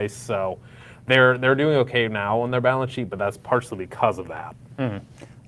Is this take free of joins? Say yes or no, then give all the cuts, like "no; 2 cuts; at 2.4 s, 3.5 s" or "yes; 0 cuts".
yes; 0 cuts